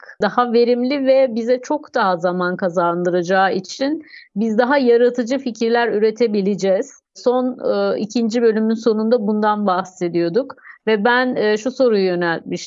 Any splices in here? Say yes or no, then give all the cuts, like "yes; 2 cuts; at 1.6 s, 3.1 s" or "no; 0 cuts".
no; 0 cuts